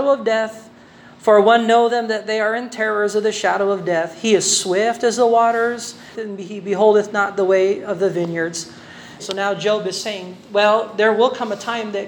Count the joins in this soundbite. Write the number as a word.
two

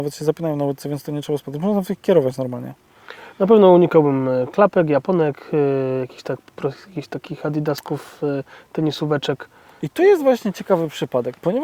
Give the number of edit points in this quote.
zero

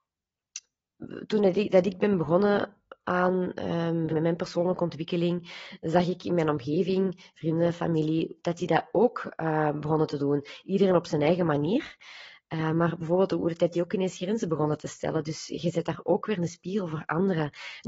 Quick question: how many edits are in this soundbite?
two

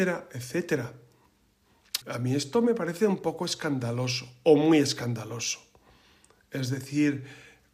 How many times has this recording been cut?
one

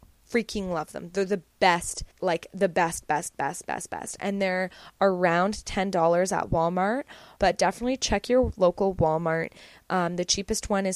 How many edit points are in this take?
two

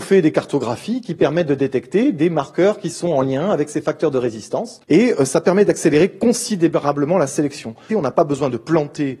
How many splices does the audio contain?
two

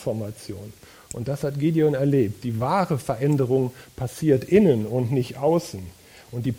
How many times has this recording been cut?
zero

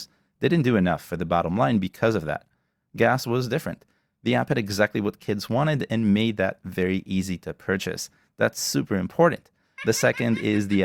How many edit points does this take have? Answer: one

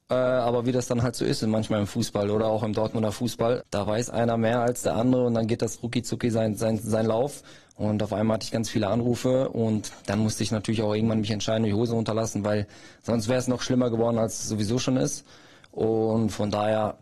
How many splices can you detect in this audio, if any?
one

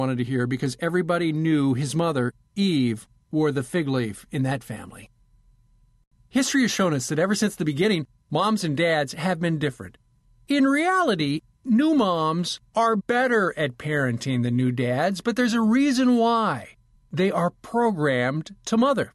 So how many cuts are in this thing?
zero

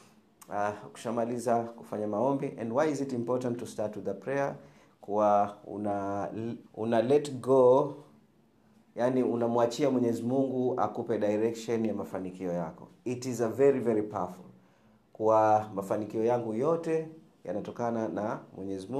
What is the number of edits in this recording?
one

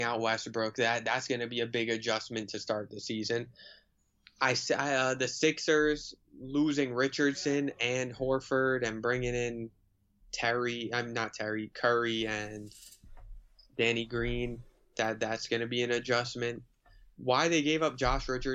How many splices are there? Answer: zero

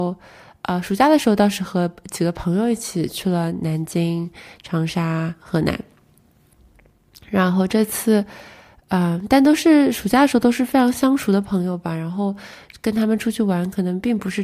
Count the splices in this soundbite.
zero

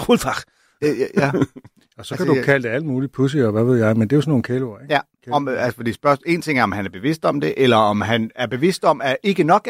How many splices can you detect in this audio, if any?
zero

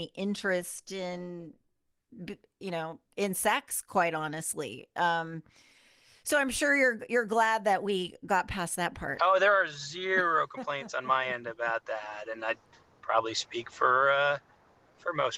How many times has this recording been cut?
zero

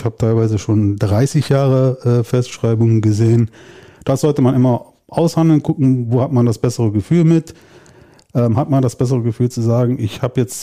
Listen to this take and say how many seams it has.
zero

